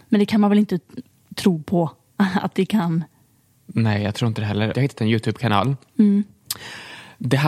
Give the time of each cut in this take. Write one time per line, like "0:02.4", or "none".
0:04.7